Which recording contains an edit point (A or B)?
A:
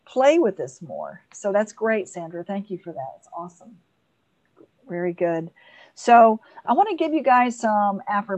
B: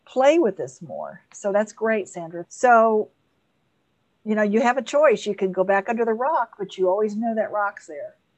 B